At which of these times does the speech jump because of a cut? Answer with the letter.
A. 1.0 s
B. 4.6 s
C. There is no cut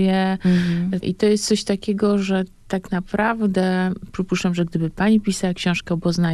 A